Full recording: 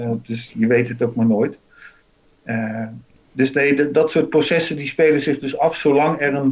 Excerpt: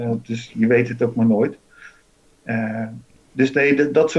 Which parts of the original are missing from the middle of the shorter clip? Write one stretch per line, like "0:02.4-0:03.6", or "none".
none